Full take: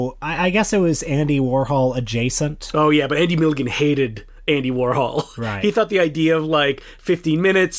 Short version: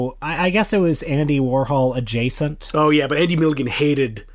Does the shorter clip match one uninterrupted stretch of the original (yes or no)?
yes